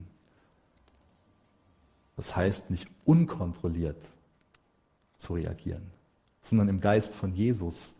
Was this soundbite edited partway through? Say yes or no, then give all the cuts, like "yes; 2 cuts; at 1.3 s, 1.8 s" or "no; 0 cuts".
no; 0 cuts